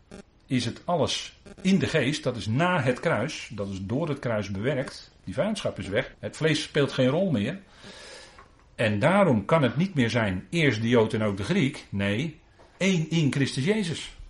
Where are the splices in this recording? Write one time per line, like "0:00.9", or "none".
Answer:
0:06.1
0:12.8

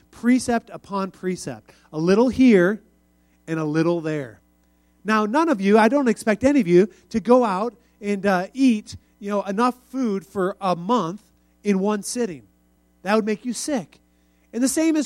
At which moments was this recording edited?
none

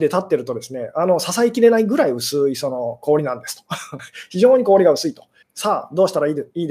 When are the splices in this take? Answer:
0:04.0
0:05.4

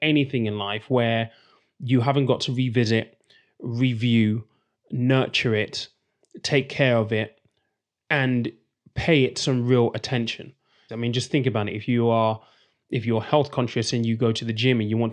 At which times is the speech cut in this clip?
0:10.9

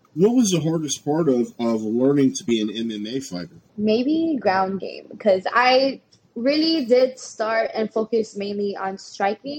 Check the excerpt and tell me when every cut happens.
0:03.7

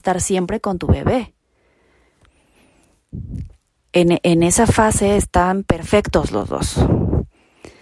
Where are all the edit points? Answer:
0:03.7

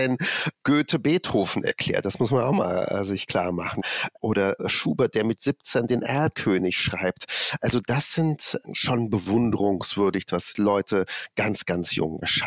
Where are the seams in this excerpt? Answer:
none

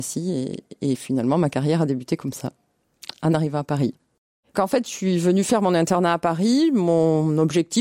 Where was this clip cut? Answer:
0:04.5

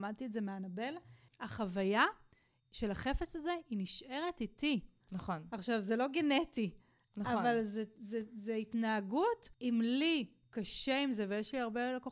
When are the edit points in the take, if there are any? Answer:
0:01.3
0:05.0
0:09.5

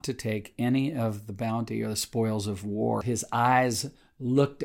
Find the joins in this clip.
0:03.0

